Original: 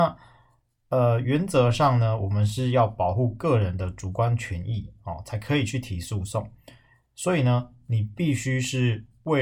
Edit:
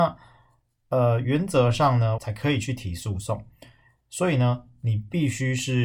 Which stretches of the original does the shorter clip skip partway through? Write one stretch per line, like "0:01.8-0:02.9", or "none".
0:02.2-0:05.2